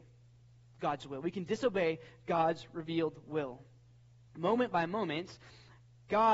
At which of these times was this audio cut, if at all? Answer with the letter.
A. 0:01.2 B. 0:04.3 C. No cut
B